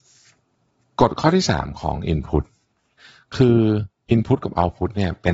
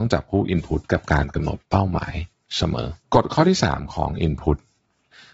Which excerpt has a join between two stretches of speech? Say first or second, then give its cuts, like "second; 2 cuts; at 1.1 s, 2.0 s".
second; 1 cut; at 3.0 s